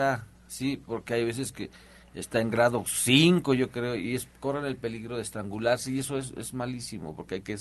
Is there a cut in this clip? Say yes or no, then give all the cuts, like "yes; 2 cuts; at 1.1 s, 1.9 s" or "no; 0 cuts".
no; 0 cuts